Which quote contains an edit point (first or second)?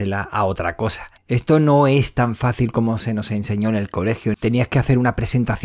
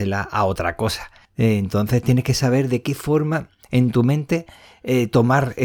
first